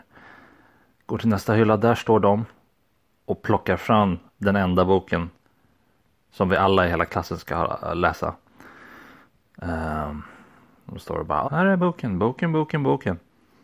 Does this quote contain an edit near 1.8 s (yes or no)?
no